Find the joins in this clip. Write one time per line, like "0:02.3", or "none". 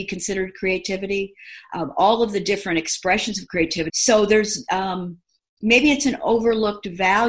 0:03.9